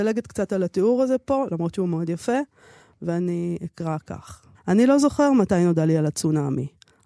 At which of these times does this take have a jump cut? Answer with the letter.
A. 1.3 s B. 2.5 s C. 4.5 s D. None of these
C